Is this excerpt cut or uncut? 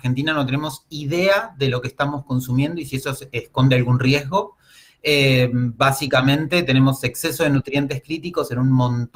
uncut